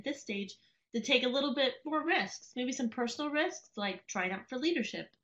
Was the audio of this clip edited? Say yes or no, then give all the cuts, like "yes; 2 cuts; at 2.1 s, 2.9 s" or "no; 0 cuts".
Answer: no; 0 cuts